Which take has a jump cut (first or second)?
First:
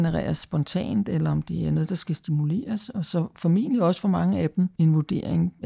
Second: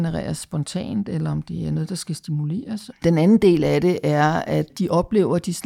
second